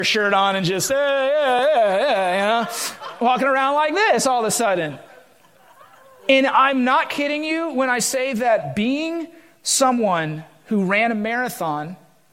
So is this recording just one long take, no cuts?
yes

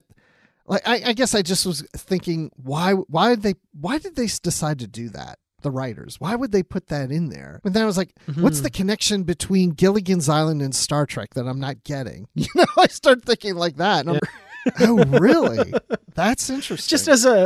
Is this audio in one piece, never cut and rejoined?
no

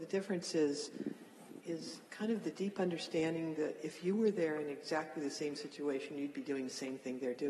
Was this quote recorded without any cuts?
yes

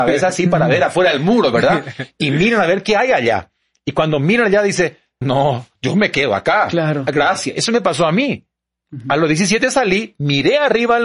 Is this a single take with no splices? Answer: no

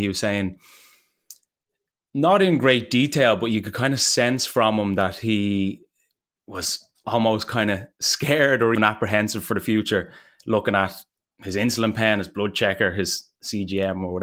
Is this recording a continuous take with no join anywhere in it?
no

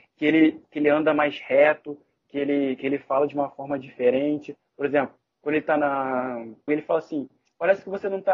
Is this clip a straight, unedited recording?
no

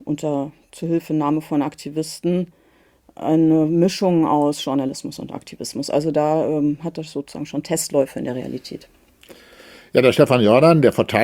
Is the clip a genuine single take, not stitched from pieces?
yes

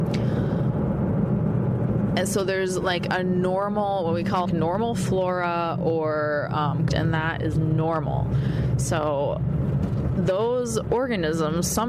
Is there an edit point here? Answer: yes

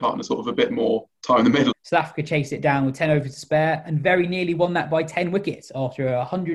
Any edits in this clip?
yes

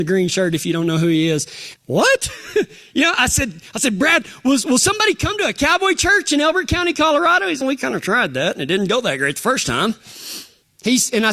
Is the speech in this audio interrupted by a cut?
yes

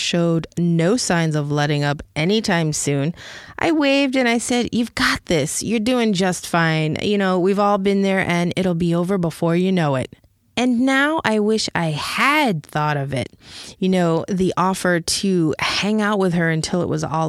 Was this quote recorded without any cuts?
yes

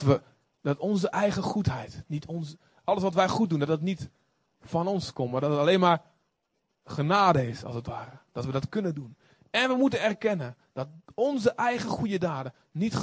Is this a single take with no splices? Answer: yes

